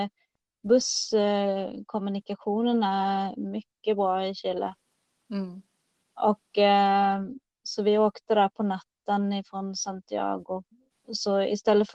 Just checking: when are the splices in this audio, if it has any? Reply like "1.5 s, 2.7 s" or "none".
none